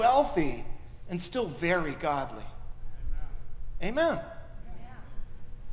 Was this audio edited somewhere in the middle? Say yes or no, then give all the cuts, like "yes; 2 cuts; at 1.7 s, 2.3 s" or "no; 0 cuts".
no; 0 cuts